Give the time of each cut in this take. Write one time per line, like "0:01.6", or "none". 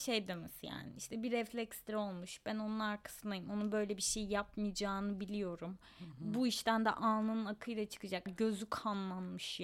0:08.3